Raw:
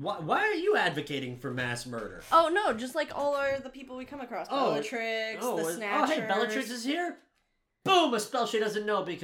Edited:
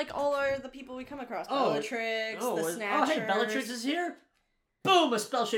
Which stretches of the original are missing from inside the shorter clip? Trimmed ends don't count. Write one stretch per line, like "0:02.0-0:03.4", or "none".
none